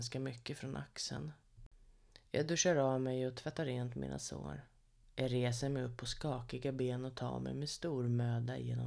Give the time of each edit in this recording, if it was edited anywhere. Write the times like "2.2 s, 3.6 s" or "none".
5.0 s